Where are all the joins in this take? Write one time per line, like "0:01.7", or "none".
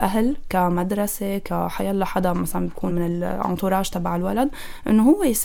0:02.9